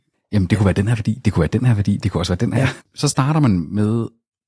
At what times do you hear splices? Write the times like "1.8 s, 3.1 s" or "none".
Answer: 2.8 s